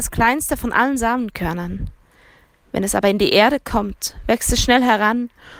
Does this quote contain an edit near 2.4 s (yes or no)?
no